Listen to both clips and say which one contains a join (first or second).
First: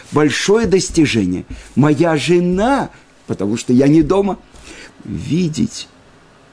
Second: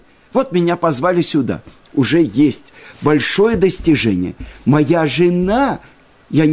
first